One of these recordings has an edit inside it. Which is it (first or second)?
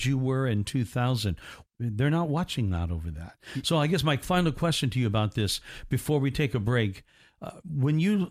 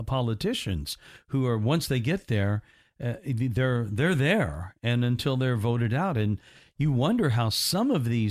first